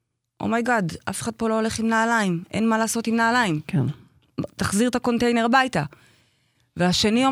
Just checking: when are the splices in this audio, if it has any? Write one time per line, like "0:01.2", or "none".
none